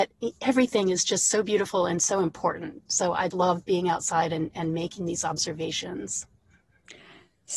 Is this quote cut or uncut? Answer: cut